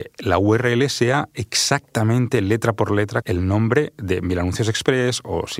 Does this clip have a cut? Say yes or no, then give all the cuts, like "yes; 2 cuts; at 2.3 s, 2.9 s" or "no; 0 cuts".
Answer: yes; 1 cut; at 3.2 s